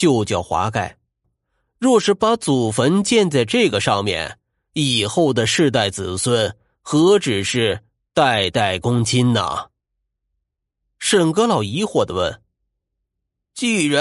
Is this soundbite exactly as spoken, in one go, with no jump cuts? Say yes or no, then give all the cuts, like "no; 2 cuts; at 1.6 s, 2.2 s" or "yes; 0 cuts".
no; 1 cut; at 1.2 s